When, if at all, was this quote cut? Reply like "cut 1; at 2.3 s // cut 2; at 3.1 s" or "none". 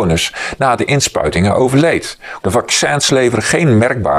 cut 1; at 2.4 s